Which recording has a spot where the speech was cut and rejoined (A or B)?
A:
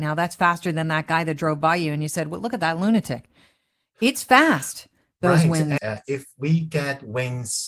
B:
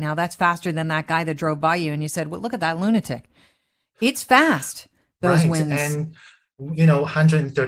A